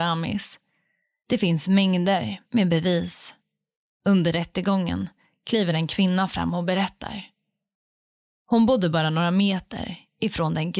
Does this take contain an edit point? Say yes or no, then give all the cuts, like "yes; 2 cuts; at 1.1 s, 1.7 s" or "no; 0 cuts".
no; 0 cuts